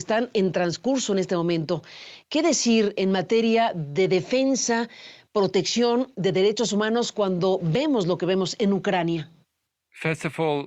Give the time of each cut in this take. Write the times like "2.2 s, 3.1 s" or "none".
none